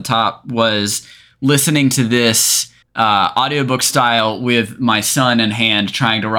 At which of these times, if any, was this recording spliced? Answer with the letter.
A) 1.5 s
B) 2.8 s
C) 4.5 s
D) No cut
B